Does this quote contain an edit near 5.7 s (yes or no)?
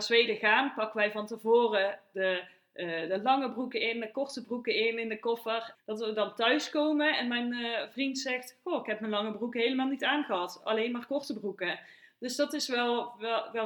yes